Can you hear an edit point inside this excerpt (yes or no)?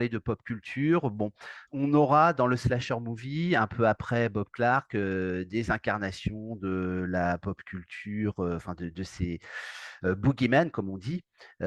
yes